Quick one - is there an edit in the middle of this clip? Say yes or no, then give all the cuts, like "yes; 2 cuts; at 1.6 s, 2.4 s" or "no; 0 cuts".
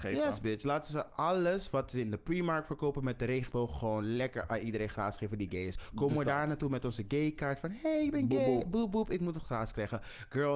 no; 0 cuts